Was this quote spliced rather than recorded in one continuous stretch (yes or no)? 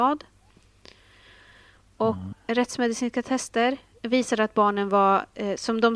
yes